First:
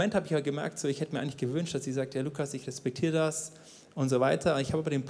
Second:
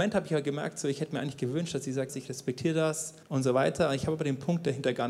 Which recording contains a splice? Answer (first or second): second